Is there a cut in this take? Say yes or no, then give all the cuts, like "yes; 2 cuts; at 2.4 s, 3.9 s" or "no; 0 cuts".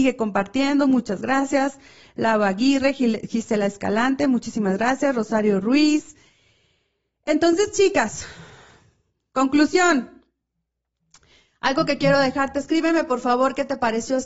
no; 0 cuts